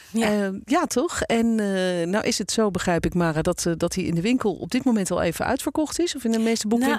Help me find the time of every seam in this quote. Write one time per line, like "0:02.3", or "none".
none